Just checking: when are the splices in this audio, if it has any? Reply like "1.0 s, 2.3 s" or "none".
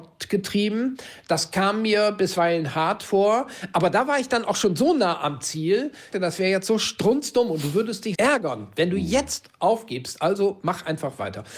6.1 s, 8.1 s